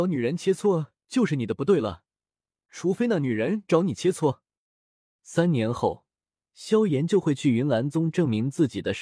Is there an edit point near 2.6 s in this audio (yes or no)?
no